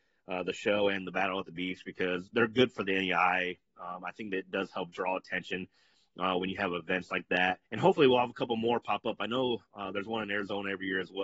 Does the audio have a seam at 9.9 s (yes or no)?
no